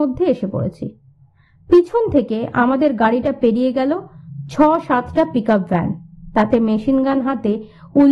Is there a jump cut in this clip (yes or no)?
no